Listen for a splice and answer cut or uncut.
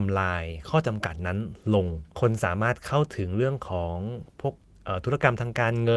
cut